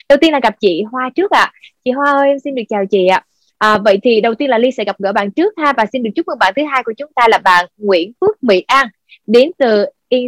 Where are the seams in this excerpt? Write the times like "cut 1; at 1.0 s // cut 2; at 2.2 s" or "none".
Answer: cut 1; at 3.5 s